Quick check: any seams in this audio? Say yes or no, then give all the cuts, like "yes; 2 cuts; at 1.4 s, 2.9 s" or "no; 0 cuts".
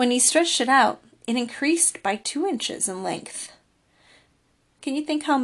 no; 0 cuts